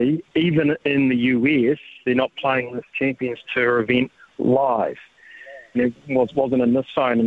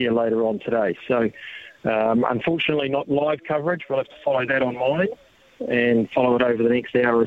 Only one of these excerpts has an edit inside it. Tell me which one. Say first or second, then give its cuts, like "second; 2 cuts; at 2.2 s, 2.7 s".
first; 1 cut; at 5.7 s